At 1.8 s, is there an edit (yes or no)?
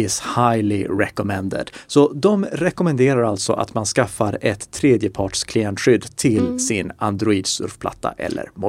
no